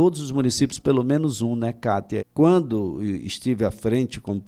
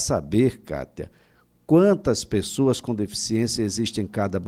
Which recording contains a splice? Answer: first; 1 cut; at 2.2 s

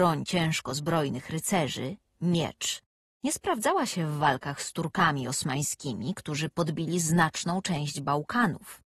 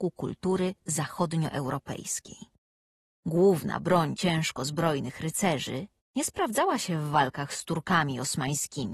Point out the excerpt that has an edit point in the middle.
second; 1 cut; at 6.0 s

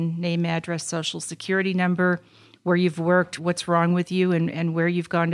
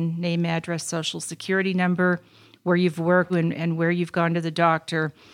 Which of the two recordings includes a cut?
second; 1 cut; at 3.3 s

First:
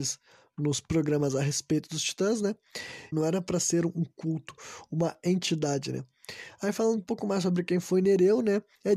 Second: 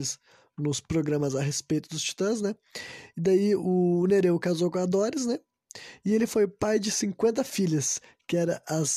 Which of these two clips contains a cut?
first; 1 cut; at 3.1 s

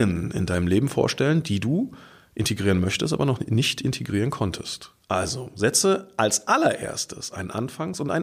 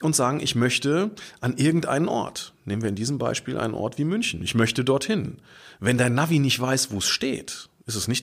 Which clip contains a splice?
first; 1 cut; at 5.0 s

